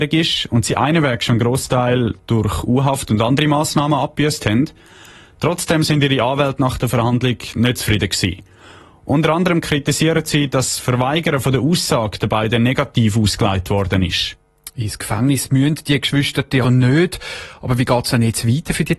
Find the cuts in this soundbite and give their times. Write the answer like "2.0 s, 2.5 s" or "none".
16.6 s